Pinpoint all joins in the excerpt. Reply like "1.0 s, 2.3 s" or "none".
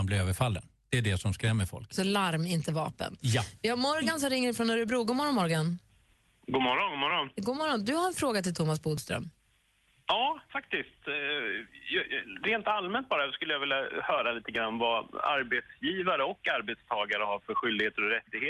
none